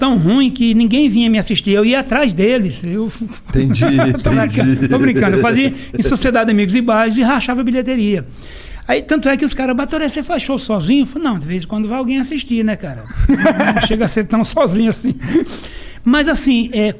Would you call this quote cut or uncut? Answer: uncut